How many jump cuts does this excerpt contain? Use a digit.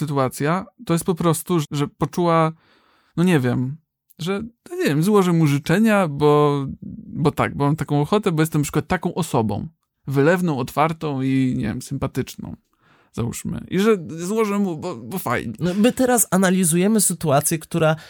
1